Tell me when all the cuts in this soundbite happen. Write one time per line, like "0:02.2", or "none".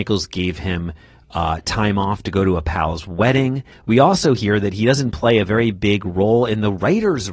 0:03.7